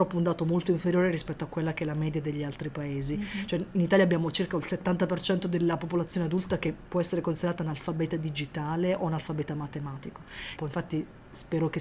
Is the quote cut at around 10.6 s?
yes; 1 cut; at 10.6 s

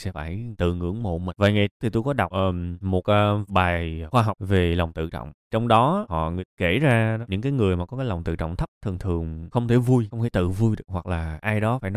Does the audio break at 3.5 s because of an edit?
yes; 1 cut; at 3.5 s

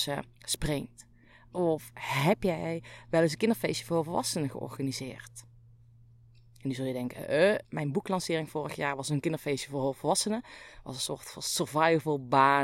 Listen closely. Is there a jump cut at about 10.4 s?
no; 1 cut; at 7.6 s

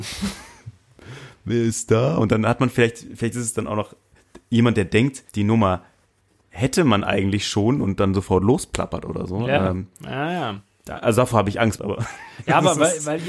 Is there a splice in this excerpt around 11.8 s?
yes; 2 cuts; at 5.3 s, 11.8 s

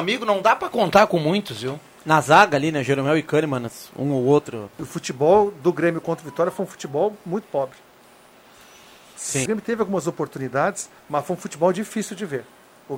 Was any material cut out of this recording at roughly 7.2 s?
no; 3 cuts; at 4.7 s, 9.5 s, 11.0 s

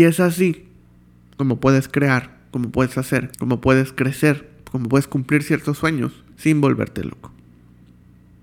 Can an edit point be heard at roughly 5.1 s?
no; 2 cuts; at 3.3 s, 6.3 s

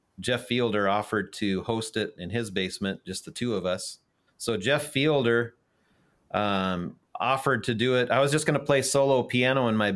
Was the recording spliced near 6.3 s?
no; 1 cut; at 4.3 s

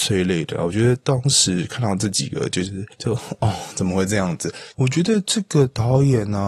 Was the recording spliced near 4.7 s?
yes; 2 cuts; at 2.9 s, 4.7 s

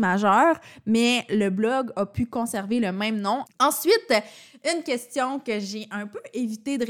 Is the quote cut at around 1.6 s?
no; 1 cut; at 3.5 s

